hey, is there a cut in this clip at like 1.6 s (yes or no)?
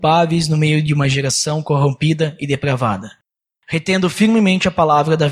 no